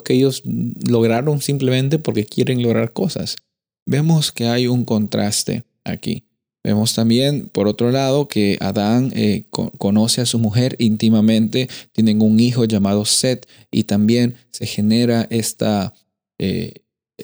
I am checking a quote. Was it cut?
no; 0 cuts

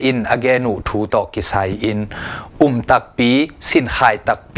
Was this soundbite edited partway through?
yes; 1 cut; at 1.1 s

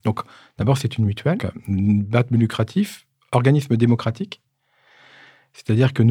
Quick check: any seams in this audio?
yes; 1 cut; at 1.4 s

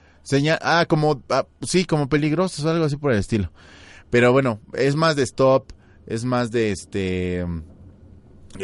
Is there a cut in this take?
no; 0 cuts

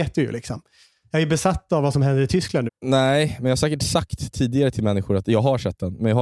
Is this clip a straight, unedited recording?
no; 1 cut; at 2.7 s

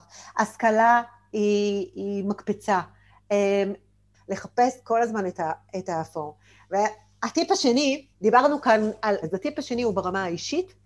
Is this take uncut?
no; 3 cuts; at 4.1 s, 8.1 s, 9.2 s

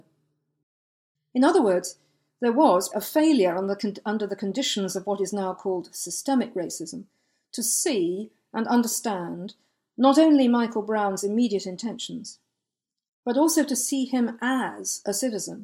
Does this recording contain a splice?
yes; 1 cut; at 2.9 s

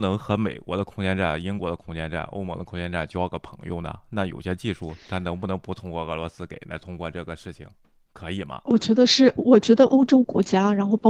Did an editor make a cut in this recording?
no; 0 cuts

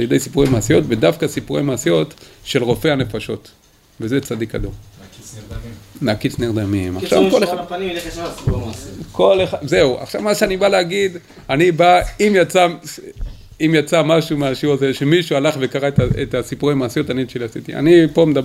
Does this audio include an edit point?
no; 0 cuts

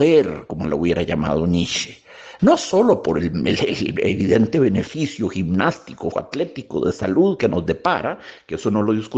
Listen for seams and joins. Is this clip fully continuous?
no; 2 cuts; at 2.4 s, 6.1 s

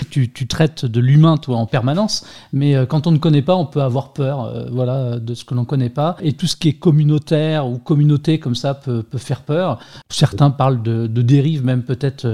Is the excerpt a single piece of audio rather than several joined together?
yes; 0 cuts

